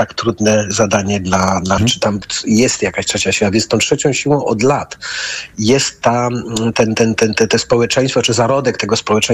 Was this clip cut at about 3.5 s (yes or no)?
no